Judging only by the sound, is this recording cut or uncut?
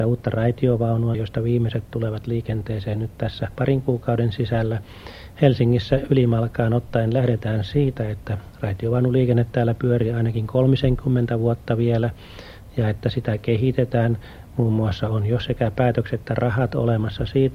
cut